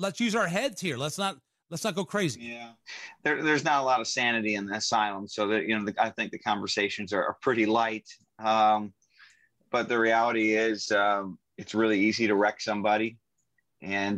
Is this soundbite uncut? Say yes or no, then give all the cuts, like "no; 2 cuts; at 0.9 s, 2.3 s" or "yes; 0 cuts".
yes; 0 cuts